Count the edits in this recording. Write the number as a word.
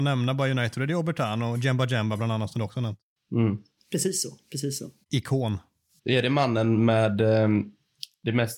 zero